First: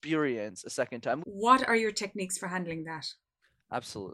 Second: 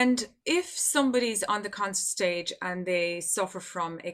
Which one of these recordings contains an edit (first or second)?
first